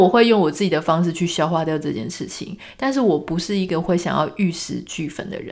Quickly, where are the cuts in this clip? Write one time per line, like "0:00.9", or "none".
none